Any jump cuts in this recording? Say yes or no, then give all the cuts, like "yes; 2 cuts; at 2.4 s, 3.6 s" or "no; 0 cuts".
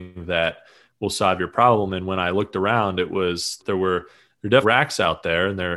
yes; 2 cuts; at 3.6 s, 4.6 s